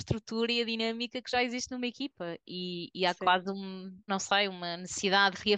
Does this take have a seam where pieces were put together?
yes; 1 cut; at 4.1 s

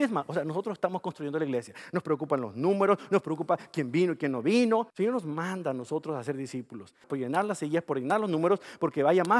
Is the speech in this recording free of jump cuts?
no; 2 cuts; at 4.9 s, 7.0 s

